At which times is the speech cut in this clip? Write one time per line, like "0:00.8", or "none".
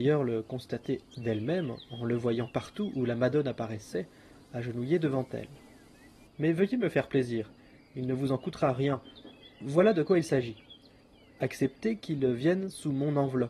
0:06.3